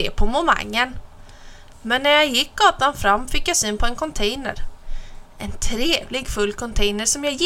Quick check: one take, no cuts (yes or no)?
no